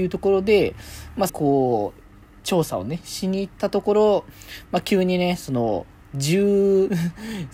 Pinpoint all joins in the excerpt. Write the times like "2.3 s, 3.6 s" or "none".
1.3 s, 6.0 s